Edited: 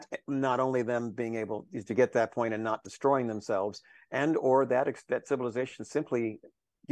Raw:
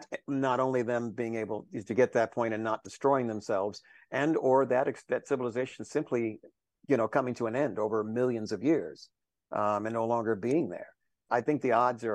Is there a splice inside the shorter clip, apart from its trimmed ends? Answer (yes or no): no